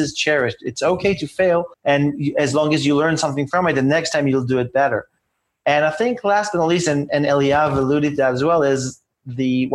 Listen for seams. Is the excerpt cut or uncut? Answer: cut